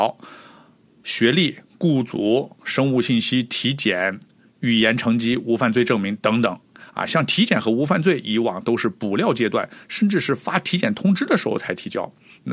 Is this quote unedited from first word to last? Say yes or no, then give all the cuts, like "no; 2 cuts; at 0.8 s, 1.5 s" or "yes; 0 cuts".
yes; 0 cuts